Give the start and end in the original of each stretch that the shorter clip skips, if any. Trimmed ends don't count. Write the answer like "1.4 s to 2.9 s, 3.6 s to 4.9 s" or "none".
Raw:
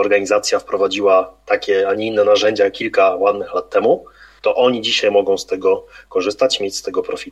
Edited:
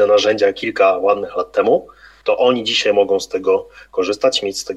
none